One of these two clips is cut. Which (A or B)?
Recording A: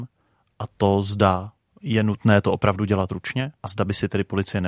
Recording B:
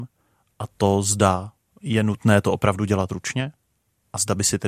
A